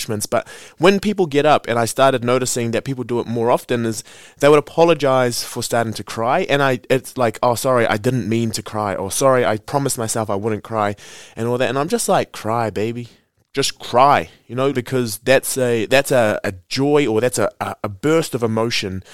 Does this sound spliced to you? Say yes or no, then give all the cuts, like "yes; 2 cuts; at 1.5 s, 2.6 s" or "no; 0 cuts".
yes; 2 cuts; at 14.7 s, 16.4 s